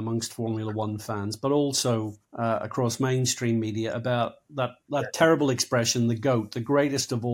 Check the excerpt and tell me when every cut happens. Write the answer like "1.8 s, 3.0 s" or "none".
2.2 s